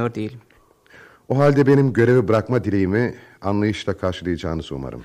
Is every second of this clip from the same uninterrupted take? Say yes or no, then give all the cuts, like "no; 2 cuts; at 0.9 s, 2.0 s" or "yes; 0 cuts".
yes; 0 cuts